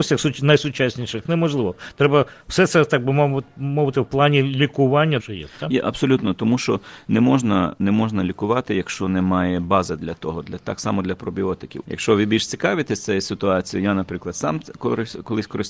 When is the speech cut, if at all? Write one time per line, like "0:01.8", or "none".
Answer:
0:05.2
0:11.8